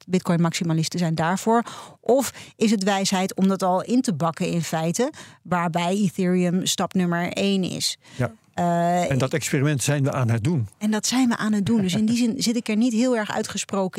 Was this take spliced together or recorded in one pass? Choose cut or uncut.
uncut